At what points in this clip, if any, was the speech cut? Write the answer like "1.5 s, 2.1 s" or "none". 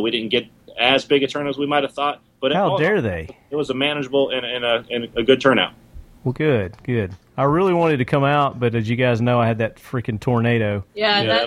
none